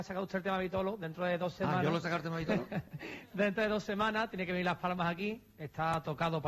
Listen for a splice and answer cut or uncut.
uncut